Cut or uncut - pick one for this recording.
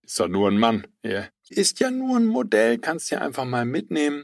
cut